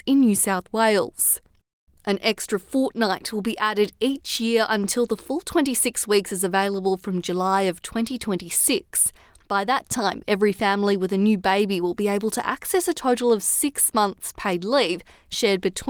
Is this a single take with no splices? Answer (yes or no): no